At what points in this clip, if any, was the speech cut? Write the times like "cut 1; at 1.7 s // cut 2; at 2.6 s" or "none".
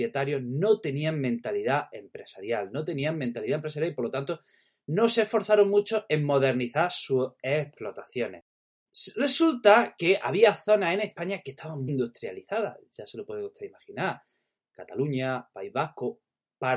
cut 1; at 11.9 s